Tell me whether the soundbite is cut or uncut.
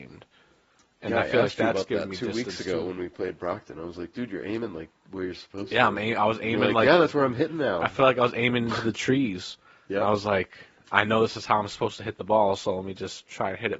uncut